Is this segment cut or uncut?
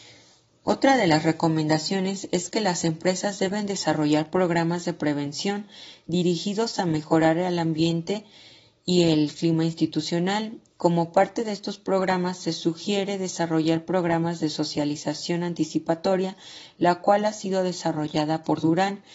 uncut